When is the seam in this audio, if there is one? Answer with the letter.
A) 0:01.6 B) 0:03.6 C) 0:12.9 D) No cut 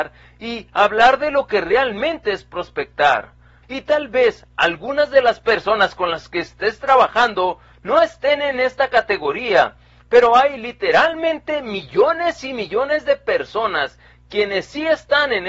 B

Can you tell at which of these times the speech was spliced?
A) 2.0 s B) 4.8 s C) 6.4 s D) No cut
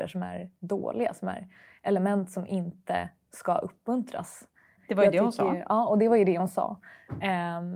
B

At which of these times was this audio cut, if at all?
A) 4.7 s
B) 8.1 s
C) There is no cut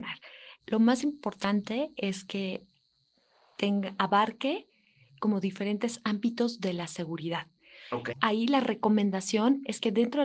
B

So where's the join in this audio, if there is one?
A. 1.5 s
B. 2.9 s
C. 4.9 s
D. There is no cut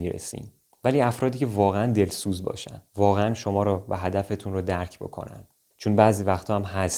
B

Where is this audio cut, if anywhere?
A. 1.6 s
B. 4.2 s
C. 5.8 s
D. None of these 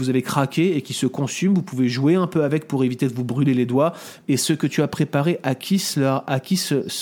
B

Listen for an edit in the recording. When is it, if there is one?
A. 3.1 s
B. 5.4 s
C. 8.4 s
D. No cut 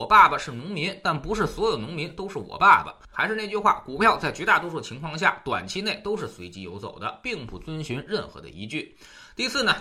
A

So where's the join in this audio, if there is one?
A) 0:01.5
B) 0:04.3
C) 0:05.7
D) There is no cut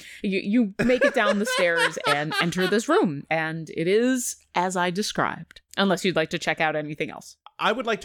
C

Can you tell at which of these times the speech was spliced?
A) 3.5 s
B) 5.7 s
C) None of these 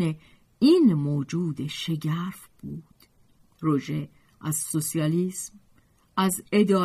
C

